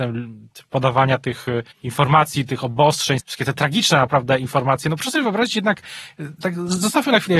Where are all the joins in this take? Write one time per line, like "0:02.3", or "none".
0:01.7
0:03.2